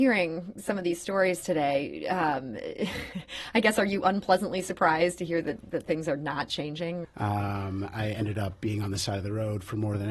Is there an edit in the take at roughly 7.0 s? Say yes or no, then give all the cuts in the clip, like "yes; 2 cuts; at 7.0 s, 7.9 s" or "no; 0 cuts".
yes; 1 cut; at 7.0 s